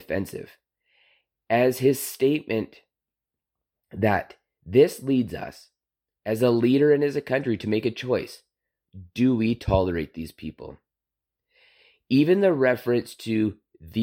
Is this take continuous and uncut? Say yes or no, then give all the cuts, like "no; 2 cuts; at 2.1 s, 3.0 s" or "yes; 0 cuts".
yes; 0 cuts